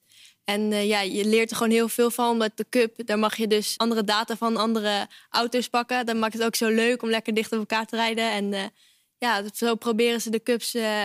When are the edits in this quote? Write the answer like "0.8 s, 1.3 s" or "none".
3.8 s